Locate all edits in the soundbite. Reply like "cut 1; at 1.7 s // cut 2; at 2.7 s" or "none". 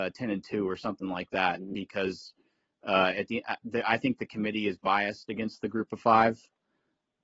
none